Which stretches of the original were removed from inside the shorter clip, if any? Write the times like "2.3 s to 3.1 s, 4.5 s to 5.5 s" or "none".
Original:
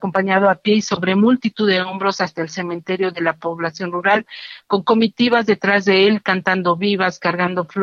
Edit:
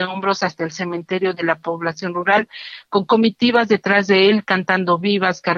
none